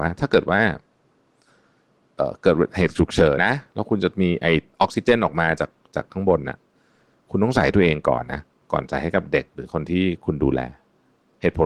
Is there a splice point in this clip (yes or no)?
yes